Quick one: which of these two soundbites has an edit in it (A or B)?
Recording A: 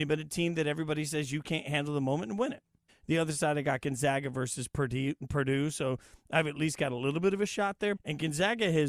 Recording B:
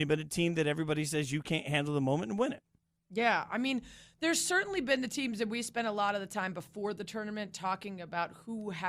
A